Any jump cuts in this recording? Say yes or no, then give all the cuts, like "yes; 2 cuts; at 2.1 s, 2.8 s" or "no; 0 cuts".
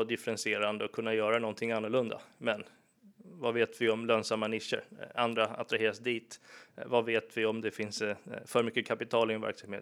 no; 0 cuts